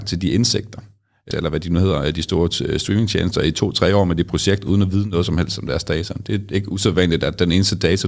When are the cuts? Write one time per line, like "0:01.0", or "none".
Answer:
0:01.3